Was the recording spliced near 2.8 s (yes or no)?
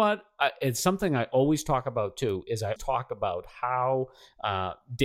yes